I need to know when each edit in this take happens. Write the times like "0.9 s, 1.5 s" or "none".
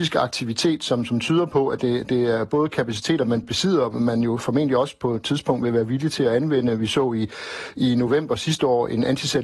none